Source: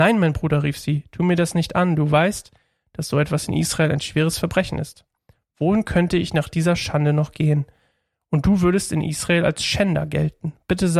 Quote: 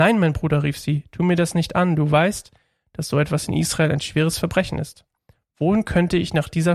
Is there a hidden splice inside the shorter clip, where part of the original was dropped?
no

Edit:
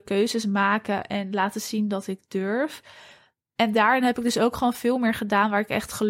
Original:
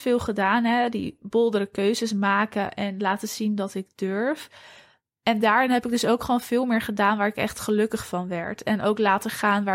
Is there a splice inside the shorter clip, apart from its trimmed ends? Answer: no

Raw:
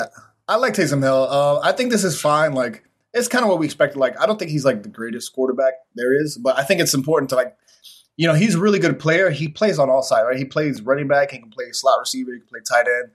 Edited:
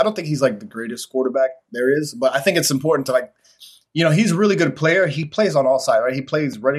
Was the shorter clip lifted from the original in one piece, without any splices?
yes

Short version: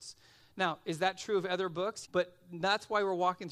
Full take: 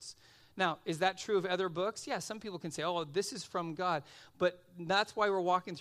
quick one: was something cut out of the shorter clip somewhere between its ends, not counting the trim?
yes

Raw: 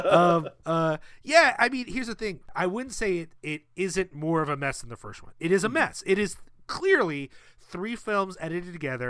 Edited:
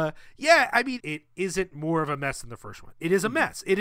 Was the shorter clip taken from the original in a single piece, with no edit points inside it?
no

